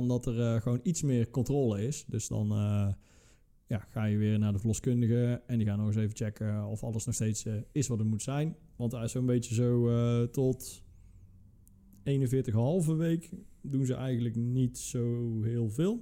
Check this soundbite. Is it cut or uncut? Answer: uncut